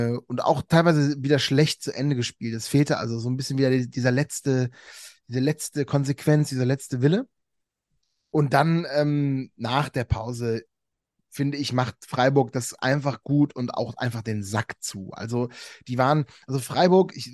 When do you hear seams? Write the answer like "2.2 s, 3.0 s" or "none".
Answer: none